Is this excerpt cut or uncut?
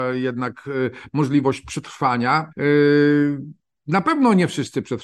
cut